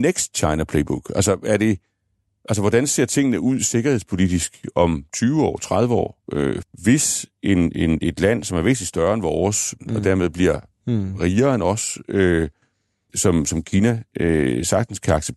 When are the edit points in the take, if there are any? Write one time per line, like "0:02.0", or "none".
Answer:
0:06.6
0:09.8
0:13.1